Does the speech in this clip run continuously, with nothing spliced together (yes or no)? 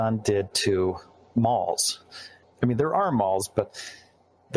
no